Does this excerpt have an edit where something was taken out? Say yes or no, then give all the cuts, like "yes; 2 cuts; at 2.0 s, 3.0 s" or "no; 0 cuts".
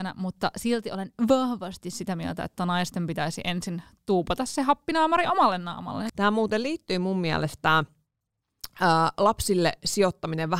yes; 1 cut; at 6.1 s